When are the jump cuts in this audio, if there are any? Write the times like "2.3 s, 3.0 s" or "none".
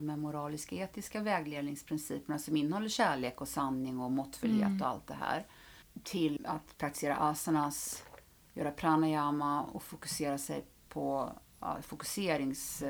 6.4 s